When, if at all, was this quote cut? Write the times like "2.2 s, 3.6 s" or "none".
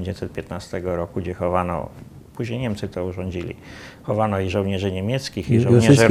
none